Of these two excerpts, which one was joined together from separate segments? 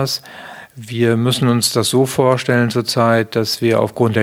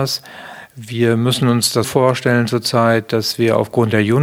second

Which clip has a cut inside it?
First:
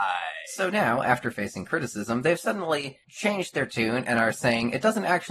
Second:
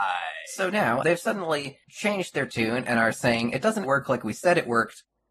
second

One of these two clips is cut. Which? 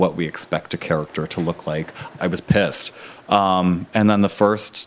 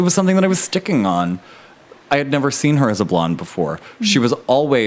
first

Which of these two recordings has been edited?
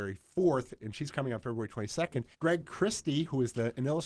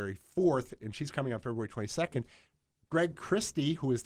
first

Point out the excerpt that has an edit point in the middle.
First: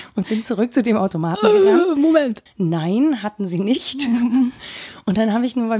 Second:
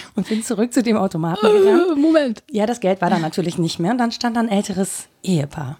first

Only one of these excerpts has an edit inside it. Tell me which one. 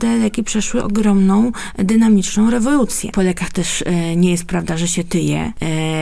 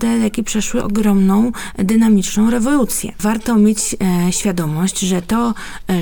first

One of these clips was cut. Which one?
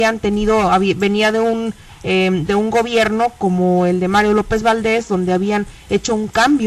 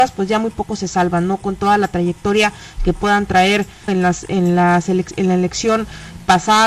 second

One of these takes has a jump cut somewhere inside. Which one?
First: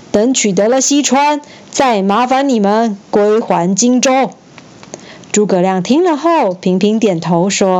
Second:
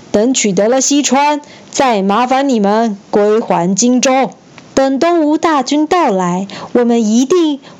second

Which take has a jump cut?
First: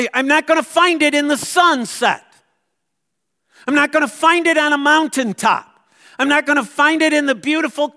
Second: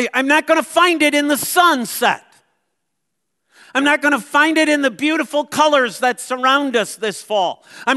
second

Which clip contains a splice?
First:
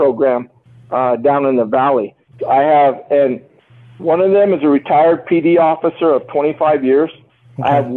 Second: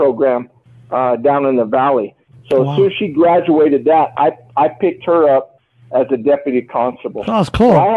first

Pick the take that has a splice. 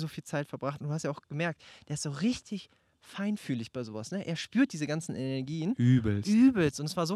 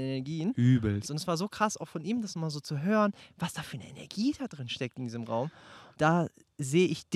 second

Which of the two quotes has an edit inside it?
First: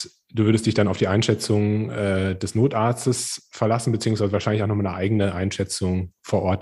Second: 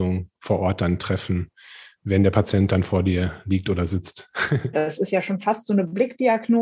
second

